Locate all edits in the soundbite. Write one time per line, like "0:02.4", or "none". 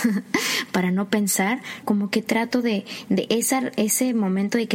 0:01.8